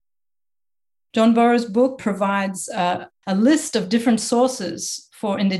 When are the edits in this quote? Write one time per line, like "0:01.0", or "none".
0:02.0
0:03.1

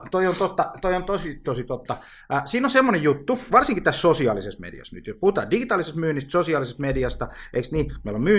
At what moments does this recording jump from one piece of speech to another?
0:01.4
0:03.5

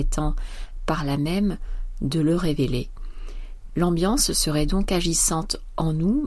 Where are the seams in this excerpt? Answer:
0:03.7

